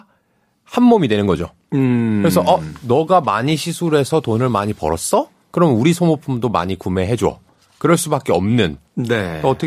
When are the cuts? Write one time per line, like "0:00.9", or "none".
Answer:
none